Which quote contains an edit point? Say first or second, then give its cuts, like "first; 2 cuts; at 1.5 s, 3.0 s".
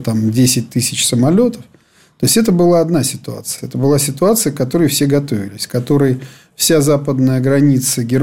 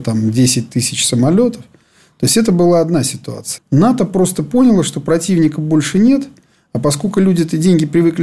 second; 1 cut; at 3.6 s